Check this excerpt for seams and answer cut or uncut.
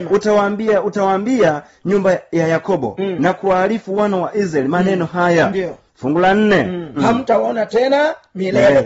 cut